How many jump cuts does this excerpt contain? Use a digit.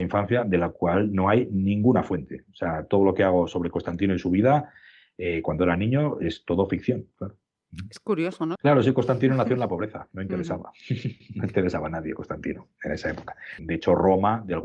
2